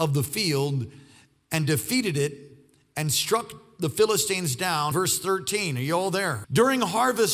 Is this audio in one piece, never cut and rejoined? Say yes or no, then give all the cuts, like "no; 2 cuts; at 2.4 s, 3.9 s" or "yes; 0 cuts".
no; 2 cuts; at 4.9 s, 6.4 s